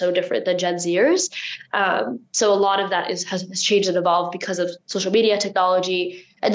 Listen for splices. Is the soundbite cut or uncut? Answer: uncut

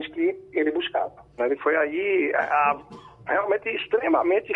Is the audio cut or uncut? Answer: cut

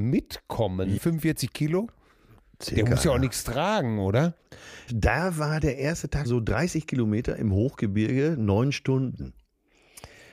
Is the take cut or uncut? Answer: cut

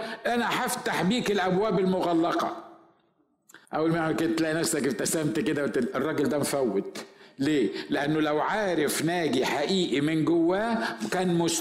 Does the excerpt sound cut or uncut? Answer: cut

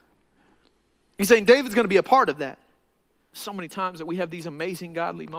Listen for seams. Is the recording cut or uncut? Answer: cut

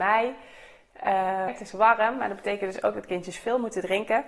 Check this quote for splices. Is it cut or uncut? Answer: cut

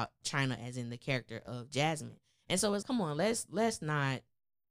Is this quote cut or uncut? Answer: cut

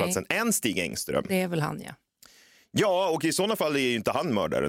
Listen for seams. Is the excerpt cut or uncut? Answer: uncut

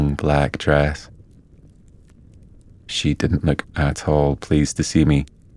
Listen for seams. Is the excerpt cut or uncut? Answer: uncut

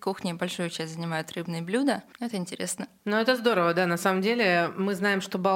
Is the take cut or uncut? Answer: cut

